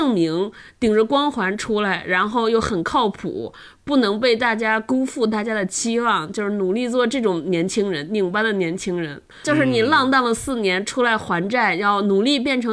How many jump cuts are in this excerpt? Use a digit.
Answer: 1